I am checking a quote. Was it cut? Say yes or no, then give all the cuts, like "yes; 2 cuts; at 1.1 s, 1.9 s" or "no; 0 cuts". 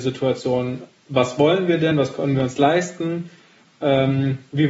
no; 0 cuts